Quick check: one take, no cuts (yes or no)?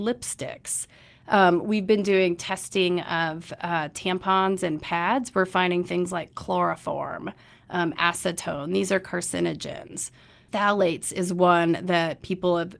yes